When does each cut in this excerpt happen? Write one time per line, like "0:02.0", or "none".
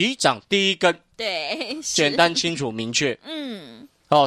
none